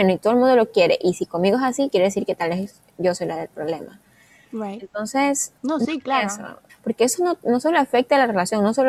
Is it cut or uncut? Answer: cut